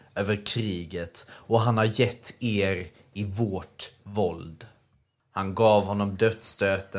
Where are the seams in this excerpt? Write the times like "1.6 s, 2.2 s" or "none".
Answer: 5.2 s

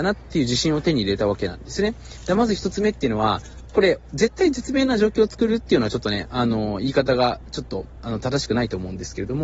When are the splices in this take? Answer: none

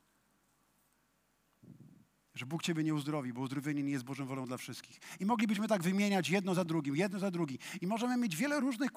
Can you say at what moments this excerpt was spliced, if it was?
none

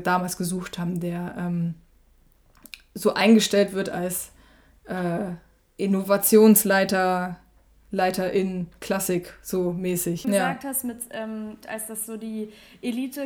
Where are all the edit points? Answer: 10.2 s, 11.6 s

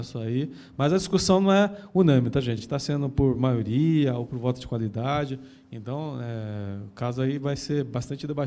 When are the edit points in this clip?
none

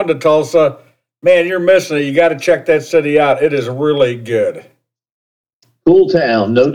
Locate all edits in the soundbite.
none

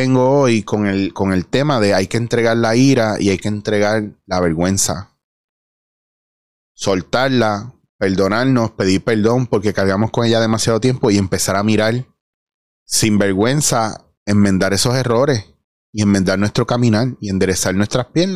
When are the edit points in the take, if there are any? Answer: none

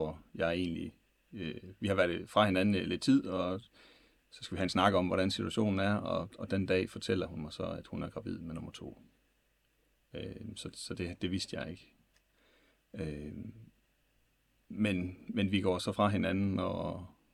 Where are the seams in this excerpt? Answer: none

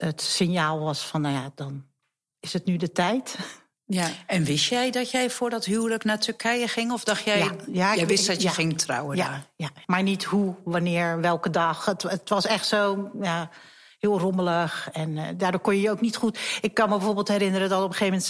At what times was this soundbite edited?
9.8 s

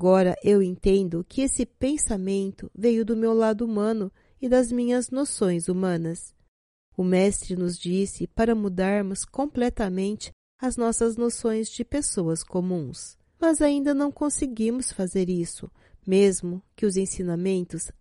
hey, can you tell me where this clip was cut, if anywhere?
none

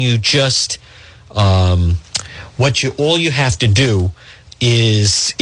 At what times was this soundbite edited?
none

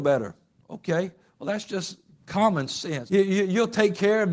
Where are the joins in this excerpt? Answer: 3.1 s

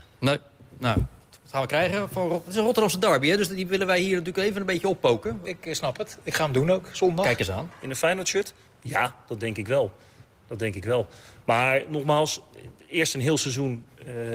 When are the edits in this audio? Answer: 7.7 s

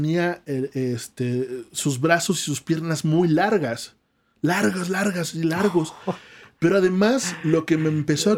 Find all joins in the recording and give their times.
none

